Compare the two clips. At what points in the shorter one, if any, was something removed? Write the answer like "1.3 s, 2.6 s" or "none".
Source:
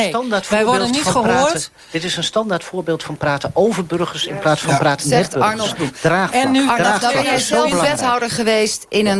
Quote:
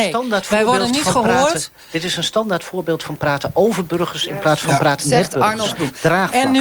none